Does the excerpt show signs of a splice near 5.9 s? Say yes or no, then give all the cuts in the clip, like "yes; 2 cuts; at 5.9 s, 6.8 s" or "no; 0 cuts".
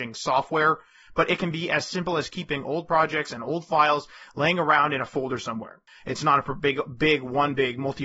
yes; 1 cut; at 5.9 s